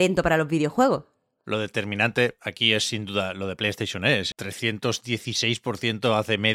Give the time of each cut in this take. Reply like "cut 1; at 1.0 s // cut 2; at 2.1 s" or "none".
cut 1; at 4.3 s